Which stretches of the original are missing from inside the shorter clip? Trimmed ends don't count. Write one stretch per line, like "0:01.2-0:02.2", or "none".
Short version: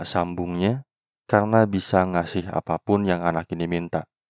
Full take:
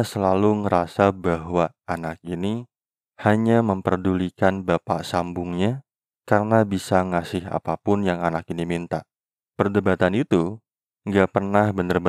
none